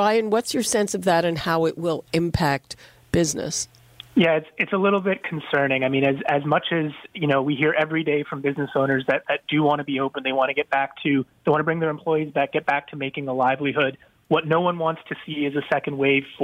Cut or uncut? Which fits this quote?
uncut